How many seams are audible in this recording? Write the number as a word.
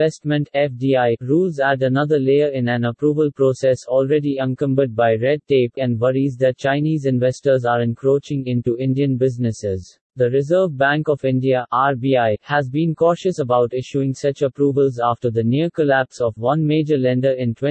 two